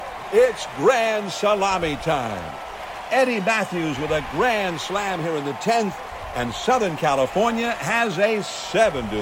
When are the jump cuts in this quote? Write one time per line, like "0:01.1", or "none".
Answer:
none